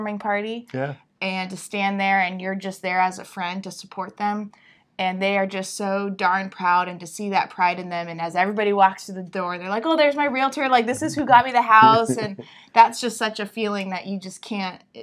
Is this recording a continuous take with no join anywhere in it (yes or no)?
yes